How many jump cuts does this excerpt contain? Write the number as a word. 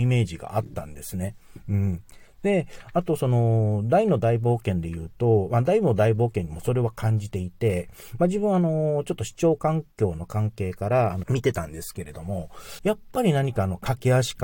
three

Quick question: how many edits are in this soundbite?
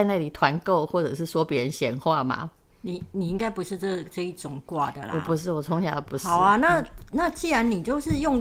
zero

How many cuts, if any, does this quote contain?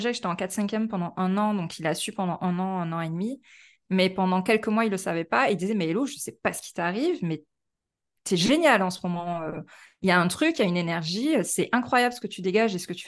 zero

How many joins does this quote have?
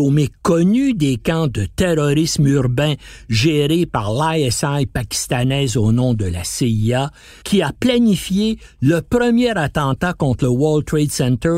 one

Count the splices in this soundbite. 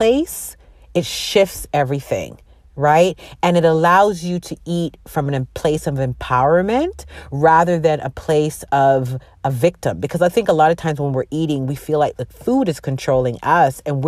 zero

